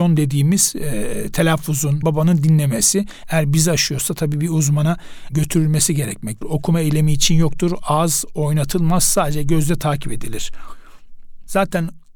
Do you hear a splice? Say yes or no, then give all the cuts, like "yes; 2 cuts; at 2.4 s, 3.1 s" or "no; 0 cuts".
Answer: yes; 3 cuts; at 2.0 s, 3.2 s, 6.4 s